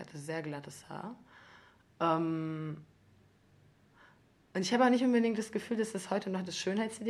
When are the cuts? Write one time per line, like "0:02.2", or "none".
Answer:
none